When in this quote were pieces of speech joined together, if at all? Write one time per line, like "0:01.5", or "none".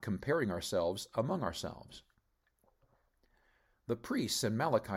none